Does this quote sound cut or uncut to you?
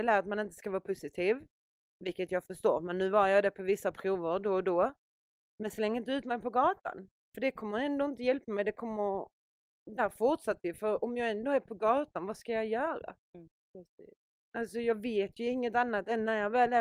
uncut